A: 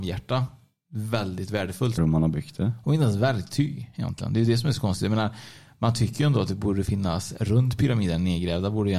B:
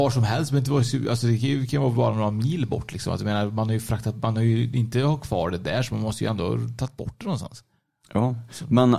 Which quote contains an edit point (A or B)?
A